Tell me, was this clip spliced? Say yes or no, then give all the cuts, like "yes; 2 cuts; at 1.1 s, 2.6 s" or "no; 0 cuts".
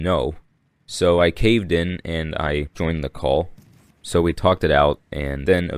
yes; 1 cut; at 3.9 s